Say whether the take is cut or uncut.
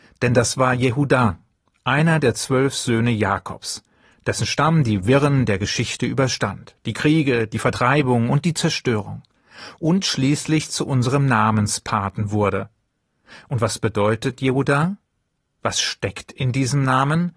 uncut